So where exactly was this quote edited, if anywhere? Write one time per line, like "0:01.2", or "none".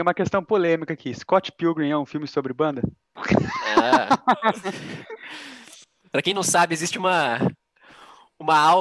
0:03.2